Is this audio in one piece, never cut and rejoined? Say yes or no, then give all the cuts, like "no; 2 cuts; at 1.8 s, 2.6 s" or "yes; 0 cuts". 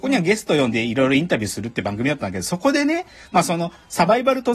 yes; 0 cuts